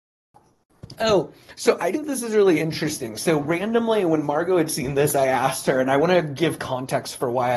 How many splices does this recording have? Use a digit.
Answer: 1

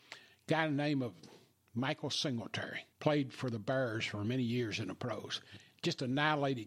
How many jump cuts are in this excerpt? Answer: 1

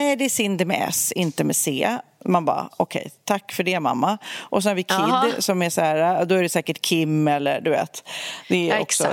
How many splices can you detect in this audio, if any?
0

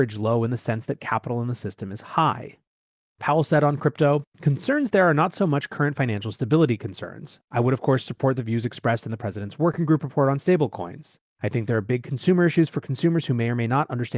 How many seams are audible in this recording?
2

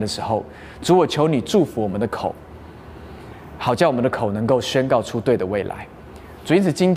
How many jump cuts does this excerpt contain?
0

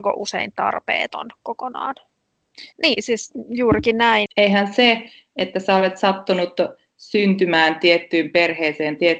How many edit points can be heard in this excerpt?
2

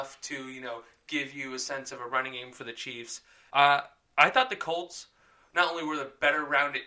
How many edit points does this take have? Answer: 1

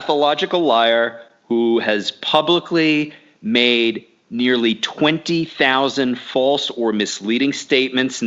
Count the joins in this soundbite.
0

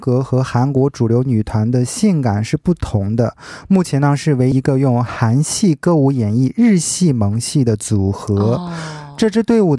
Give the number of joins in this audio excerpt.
1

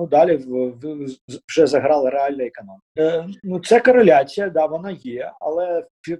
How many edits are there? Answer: 1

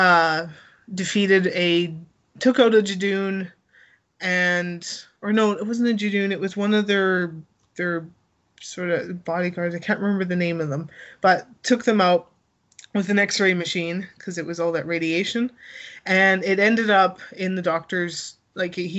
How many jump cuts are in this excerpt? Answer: 0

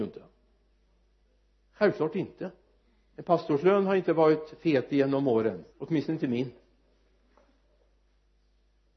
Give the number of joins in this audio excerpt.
1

